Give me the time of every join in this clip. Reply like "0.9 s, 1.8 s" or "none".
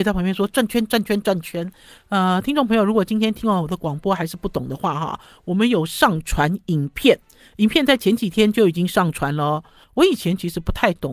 9.8 s